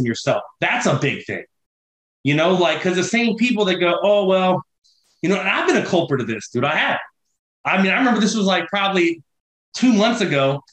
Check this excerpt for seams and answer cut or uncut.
uncut